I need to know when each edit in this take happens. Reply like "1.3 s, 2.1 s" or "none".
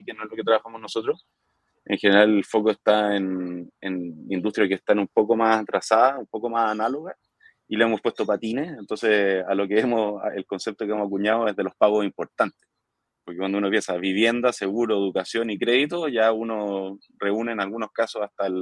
none